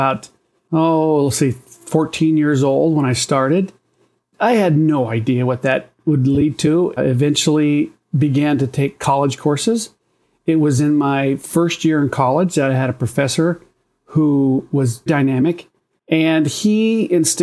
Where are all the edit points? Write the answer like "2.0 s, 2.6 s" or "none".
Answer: 7.0 s, 15.1 s